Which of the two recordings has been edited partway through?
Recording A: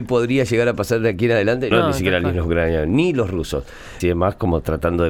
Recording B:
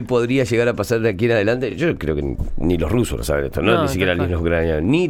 A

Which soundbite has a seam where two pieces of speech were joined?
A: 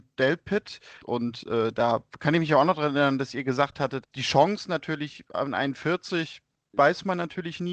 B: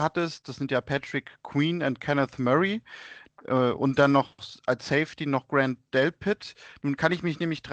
A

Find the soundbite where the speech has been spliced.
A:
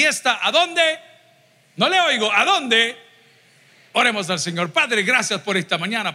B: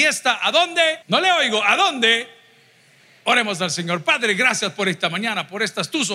B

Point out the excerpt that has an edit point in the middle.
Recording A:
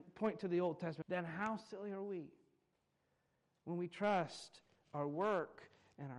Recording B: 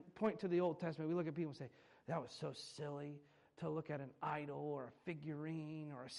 A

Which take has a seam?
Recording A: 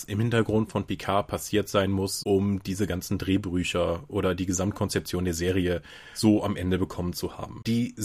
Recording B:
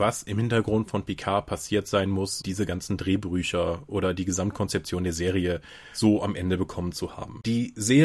B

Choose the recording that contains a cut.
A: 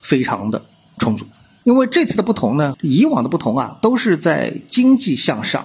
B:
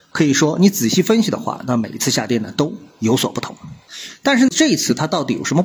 A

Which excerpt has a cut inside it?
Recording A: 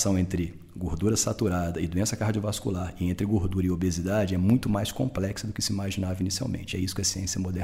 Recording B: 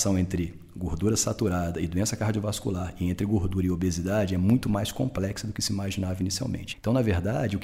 B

